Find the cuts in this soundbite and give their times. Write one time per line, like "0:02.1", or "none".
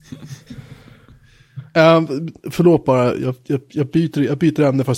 none